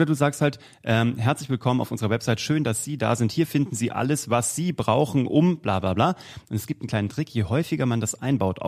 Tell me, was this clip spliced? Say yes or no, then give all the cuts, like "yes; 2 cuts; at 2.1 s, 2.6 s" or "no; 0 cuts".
no; 0 cuts